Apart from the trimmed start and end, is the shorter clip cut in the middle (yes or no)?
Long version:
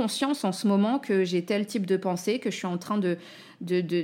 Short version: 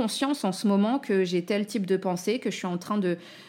no